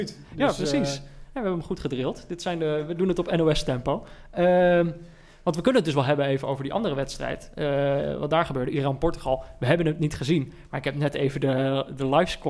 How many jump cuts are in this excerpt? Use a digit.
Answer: 0